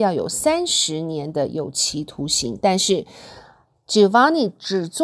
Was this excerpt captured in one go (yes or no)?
yes